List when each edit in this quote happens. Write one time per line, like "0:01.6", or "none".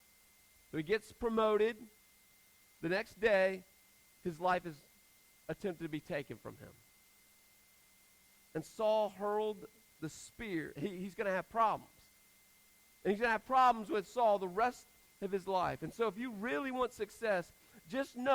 0:08.3
0:10.8